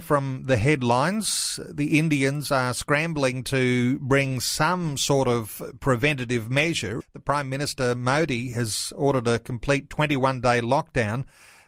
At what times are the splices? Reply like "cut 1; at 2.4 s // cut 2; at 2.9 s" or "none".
cut 1; at 7.0 s